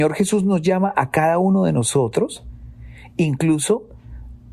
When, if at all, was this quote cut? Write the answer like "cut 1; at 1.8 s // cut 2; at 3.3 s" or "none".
none

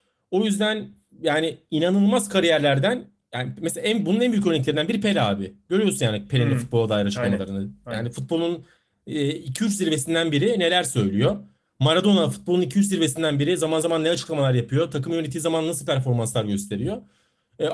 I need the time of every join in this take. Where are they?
none

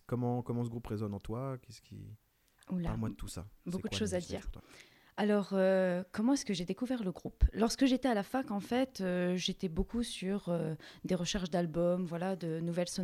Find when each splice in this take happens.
none

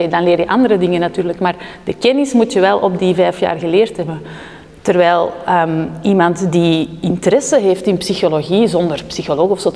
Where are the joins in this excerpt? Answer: none

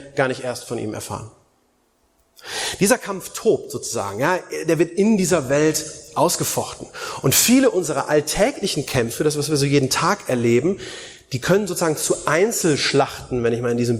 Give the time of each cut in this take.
none

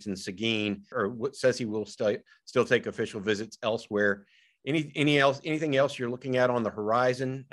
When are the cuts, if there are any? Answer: cut 1; at 0.9 s

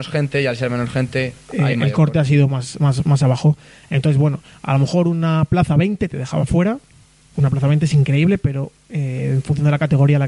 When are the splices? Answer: cut 1; at 7.3 s

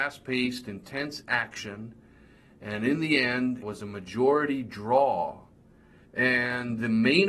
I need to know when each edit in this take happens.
cut 1; at 3.6 s // cut 2; at 6.0 s

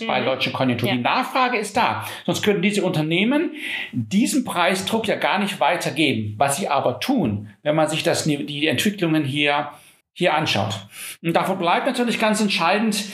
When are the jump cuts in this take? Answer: cut 1; at 10.0 s

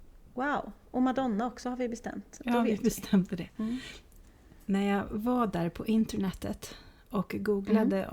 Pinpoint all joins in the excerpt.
none

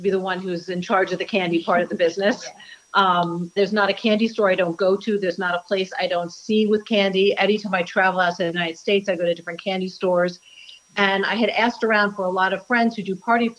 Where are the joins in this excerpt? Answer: cut 1; at 3.6 s

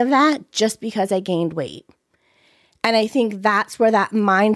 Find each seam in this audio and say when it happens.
none

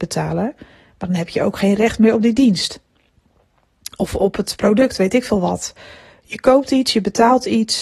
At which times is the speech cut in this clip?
none

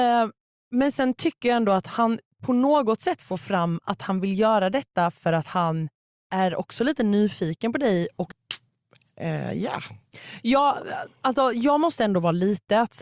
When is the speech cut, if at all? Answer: cut 1; at 8.3 s

